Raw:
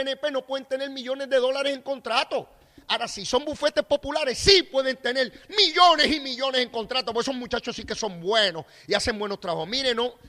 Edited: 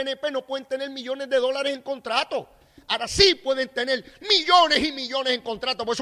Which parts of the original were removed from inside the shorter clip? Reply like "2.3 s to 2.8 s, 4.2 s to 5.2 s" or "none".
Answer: 3.1 s to 4.3 s